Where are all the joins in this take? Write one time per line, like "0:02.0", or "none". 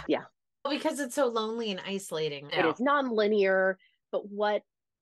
0:02.5